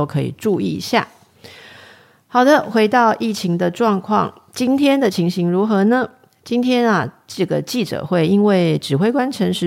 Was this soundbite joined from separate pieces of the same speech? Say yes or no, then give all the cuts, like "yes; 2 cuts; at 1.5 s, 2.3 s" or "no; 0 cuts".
no; 0 cuts